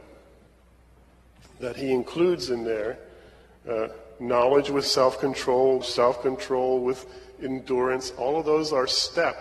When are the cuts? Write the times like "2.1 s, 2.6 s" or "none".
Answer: 5.8 s